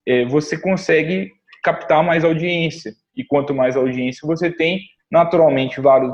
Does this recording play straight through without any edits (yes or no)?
yes